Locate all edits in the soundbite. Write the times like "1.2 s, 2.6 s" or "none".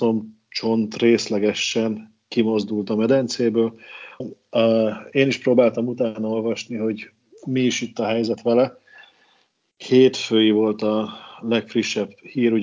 4.2 s